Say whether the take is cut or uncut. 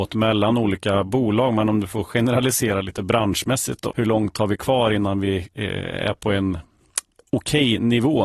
cut